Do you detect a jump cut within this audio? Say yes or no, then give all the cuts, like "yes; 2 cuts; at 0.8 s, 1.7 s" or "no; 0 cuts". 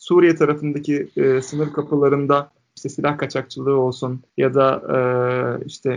yes; 1 cut; at 4.3 s